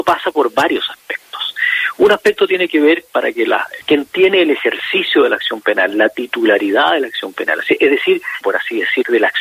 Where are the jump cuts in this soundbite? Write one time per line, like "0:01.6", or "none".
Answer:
0:03.8
0:08.4